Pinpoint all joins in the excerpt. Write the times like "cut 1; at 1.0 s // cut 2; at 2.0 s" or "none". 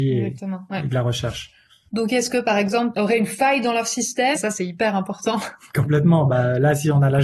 cut 1; at 1.9 s // cut 2; at 2.9 s // cut 3; at 4.4 s